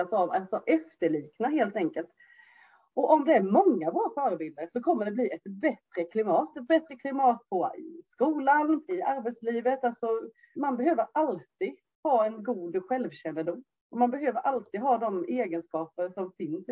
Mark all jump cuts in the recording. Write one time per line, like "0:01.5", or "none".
0:08.9
0:10.6